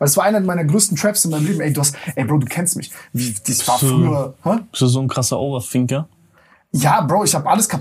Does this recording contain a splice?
no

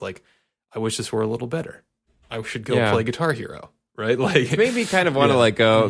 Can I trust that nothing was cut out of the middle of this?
yes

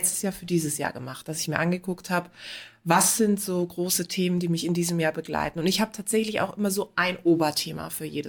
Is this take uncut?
yes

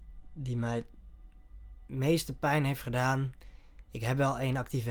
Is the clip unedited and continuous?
yes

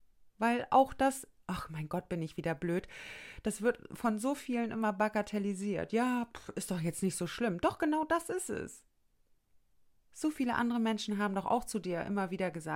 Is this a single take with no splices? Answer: yes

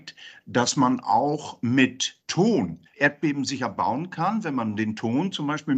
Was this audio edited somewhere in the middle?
yes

